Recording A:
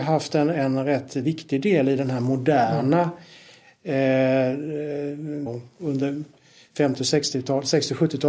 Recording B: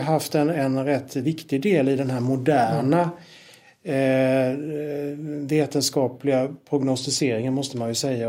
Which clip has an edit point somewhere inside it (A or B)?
A